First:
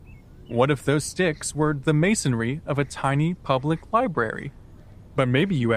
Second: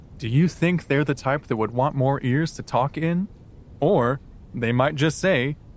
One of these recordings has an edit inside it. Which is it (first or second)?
second